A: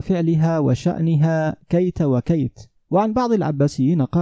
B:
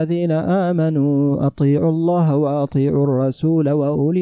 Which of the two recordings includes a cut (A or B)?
A